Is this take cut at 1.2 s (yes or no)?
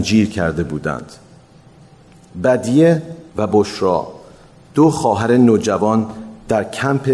no